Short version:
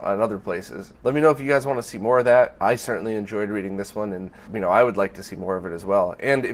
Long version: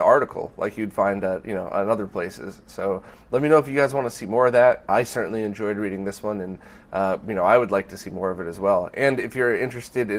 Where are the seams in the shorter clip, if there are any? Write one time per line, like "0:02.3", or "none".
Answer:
0:00.9
0:04.5